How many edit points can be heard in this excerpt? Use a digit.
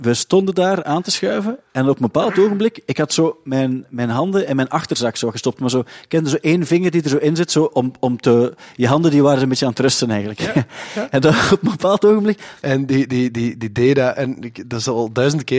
1